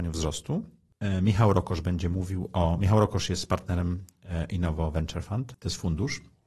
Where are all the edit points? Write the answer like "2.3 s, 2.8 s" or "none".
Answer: 5.5 s